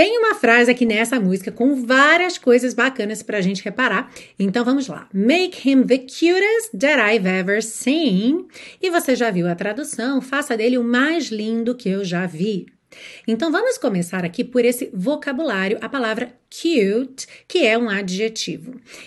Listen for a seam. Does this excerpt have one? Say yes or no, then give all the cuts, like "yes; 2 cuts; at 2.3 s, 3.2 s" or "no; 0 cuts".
no; 0 cuts